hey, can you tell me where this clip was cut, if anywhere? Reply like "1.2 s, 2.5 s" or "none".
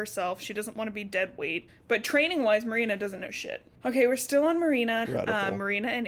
1.7 s, 3.7 s, 5.1 s